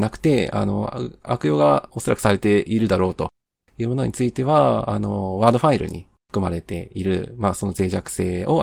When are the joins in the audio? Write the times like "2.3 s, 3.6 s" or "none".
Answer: none